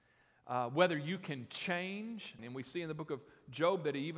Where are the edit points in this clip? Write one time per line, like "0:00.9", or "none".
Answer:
0:02.4